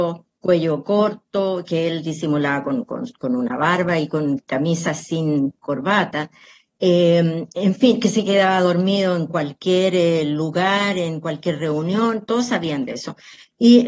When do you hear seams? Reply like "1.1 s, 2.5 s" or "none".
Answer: none